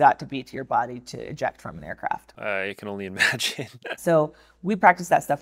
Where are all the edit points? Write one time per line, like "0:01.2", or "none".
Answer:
0:02.4
0:04.0